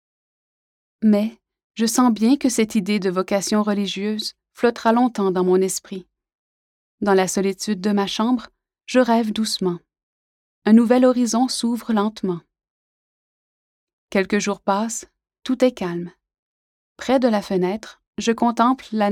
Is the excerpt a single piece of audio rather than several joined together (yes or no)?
no